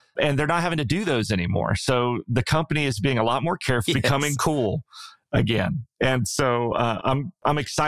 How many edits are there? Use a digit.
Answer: 1